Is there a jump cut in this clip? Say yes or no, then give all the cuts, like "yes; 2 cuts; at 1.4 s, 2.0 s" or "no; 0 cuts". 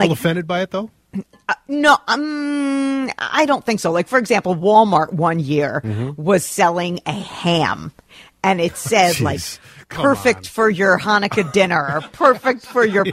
no; 0 cuts